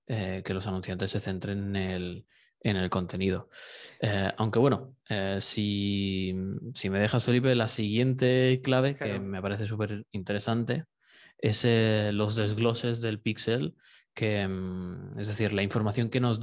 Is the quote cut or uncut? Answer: uncut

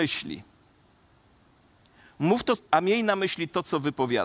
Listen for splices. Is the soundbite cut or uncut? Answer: cut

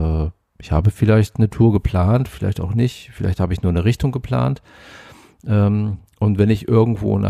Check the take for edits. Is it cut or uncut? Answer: uncut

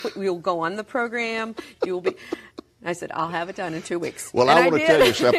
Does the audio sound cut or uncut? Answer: uncut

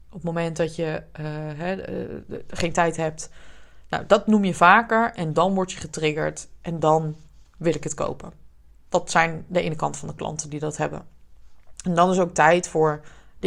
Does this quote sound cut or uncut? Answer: uncut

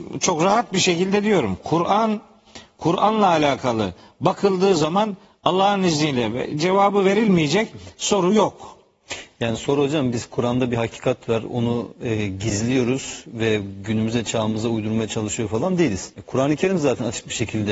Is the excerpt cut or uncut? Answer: cut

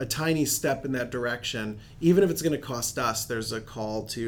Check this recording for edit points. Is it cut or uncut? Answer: uncut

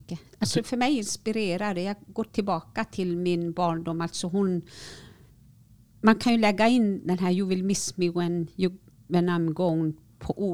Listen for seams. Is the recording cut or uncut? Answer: uncut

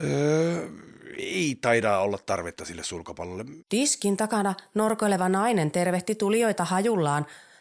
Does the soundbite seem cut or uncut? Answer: cut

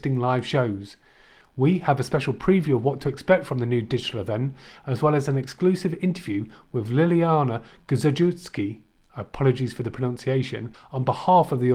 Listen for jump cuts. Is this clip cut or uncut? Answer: uncut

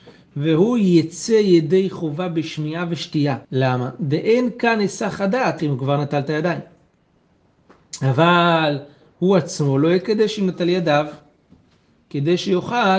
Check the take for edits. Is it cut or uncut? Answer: cut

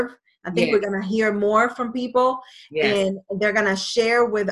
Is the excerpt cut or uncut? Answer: uncut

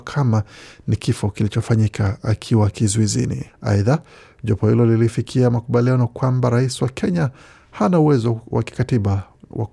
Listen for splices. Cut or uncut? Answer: cut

